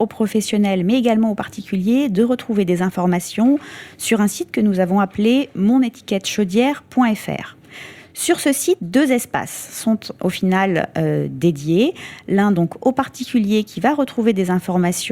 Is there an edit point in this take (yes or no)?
no